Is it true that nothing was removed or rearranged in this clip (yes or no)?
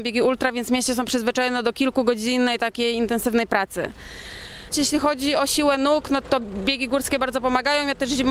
no